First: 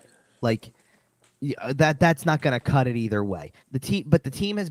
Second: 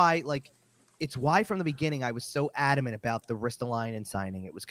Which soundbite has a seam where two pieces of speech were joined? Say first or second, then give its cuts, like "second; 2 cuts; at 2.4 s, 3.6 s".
first; 1 cut; at 3.6 s